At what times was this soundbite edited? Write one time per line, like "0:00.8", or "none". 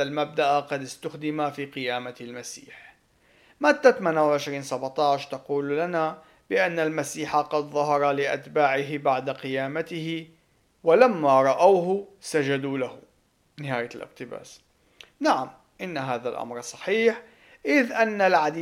none